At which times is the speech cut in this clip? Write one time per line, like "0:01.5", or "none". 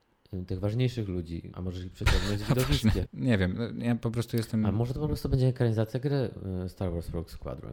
0:01.5
0:03.1

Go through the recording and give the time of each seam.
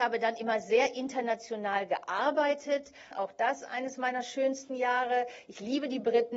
0:03.1

